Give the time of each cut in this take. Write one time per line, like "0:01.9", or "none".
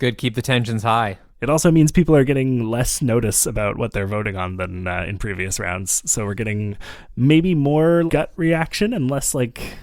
0:01.3
0:08.1